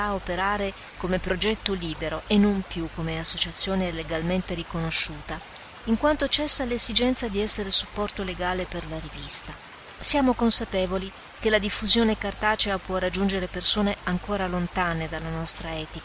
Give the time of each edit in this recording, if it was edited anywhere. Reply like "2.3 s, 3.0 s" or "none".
10.0 s

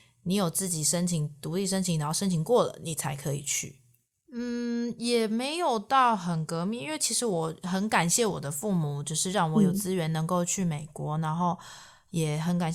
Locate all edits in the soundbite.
4.2 s

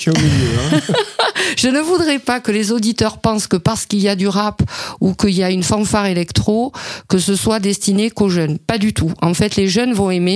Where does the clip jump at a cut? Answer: none

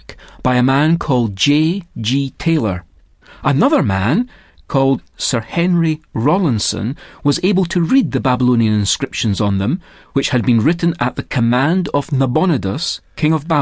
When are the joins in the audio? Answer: none

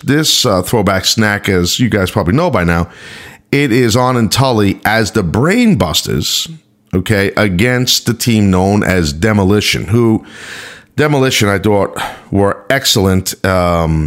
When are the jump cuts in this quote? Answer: none

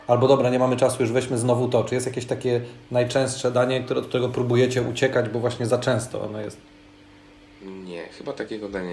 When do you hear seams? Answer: none

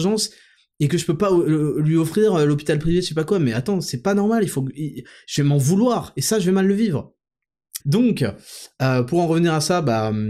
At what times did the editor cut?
7.8 s

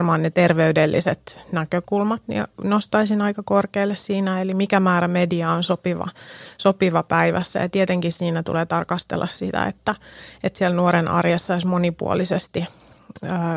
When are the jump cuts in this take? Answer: none

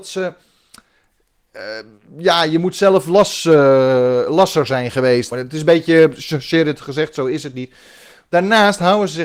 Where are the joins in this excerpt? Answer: 5.3 s

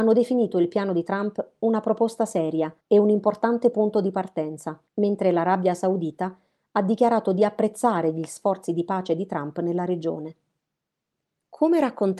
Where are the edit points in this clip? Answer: 2.8 s, 4.9 s

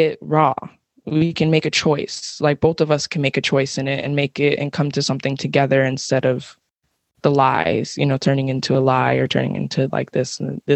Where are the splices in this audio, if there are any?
none

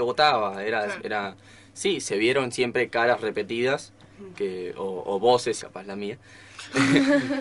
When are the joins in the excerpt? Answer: 1.0 s, 5.6 s

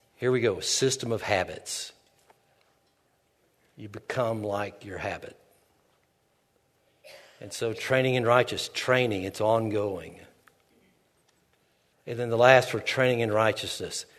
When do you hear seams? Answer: 11.9 s

